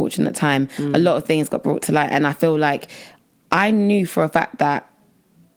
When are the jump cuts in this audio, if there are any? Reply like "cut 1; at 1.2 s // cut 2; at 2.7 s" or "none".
none